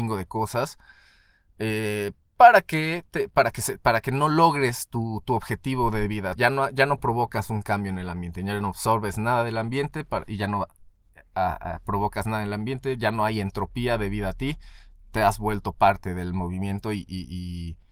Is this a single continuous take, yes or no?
no